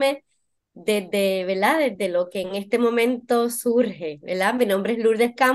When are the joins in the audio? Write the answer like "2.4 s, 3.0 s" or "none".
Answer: none